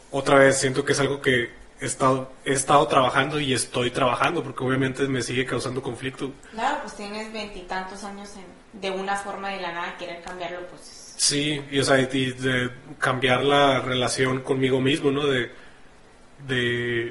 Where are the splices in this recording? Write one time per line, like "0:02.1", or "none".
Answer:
none